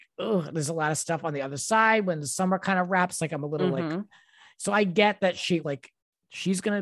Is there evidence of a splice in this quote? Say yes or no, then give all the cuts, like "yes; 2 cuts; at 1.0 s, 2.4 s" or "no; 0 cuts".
yes; 1 cut; at 5.6 s